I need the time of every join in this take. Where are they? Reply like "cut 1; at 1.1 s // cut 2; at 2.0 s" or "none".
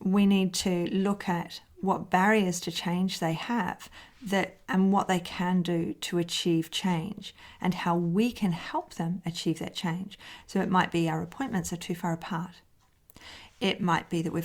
none